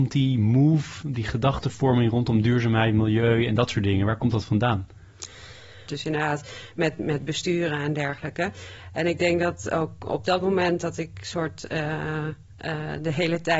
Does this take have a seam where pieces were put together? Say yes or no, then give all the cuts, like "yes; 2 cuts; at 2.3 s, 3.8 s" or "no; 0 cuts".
yes; 1 cut; at 5.9 s